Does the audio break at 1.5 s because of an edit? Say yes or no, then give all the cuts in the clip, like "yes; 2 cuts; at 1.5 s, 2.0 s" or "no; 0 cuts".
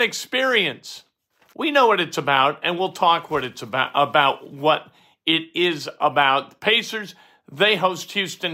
yes; 1 cut; at 1.5 s